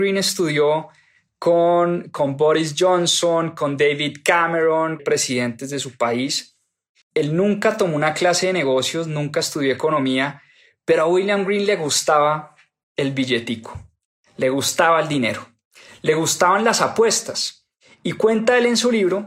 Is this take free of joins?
no; 2 cuts; at 5.0 s, 7.0 s

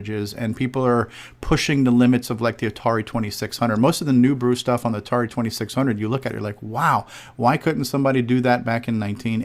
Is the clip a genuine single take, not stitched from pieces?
yes; 0 cuts

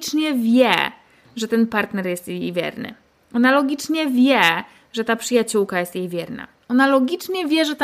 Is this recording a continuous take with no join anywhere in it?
yes; 0 cuts

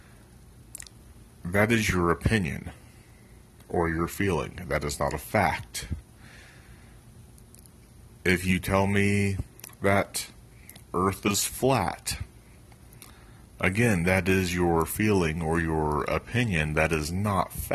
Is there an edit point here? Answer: no; 0 cuts

